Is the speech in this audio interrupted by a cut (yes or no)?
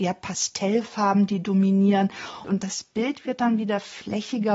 yes